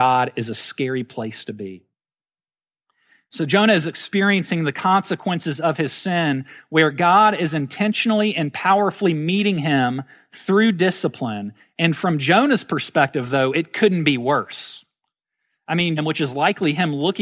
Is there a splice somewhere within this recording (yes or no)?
yes